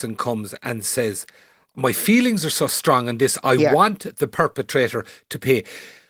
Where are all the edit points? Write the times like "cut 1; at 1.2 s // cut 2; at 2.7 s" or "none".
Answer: none